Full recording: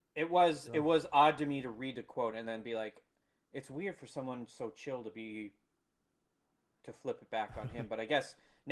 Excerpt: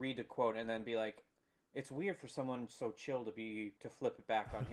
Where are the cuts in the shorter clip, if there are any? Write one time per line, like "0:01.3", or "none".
0:03.8